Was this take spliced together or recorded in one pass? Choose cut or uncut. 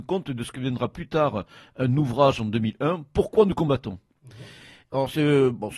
uncut